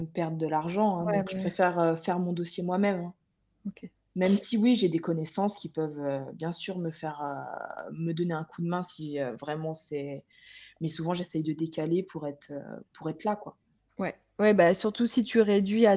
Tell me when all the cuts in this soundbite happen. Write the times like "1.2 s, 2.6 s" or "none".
none